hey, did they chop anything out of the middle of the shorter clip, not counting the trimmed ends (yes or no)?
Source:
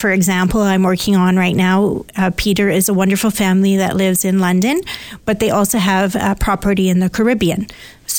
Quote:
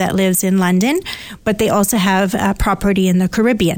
no